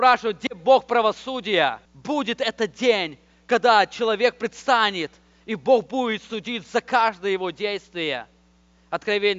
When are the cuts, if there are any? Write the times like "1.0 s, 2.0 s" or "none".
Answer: 1.9 s